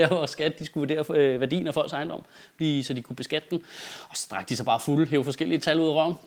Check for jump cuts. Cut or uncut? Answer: uncut